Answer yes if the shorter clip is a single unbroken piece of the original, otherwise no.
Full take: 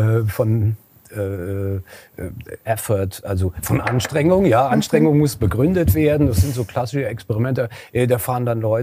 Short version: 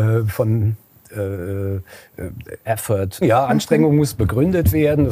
no